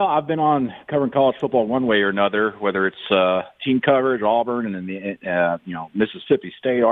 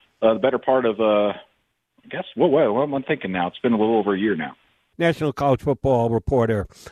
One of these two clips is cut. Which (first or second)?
second